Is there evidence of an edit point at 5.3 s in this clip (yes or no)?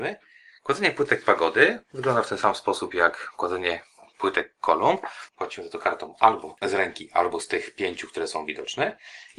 yes